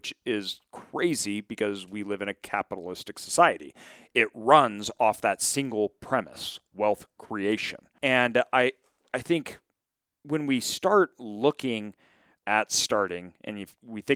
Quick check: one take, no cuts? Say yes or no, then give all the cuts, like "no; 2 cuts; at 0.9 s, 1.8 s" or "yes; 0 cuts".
no; 1 cut; at 8.0 s